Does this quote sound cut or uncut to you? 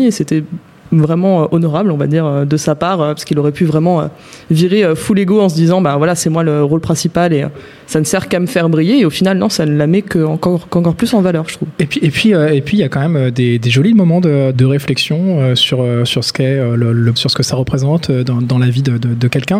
cut